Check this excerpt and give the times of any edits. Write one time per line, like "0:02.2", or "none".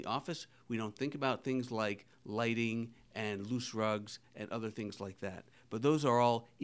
none